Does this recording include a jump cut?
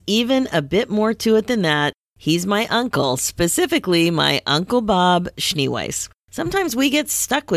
yes; 1 cut; at 6.2 s

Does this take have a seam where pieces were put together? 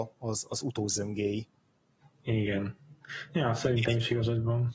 no; 0 cuts

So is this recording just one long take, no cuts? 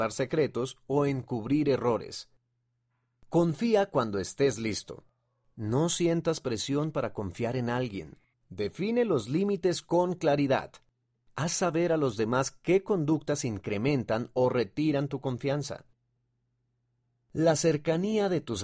no; 1 cut; at 8.3 s

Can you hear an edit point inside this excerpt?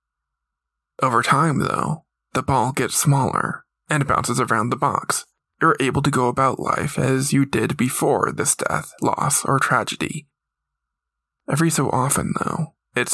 no; 0 cuts

